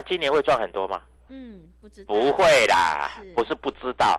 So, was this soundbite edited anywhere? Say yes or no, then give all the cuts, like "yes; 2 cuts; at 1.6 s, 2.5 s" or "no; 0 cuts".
yes; 1 cut; at 1.3 s